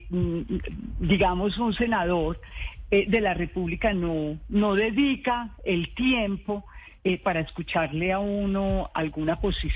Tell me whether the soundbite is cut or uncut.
uncut